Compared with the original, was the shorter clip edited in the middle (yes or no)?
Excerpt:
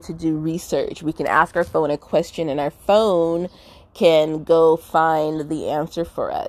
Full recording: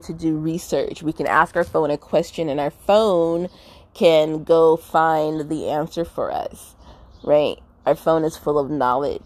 no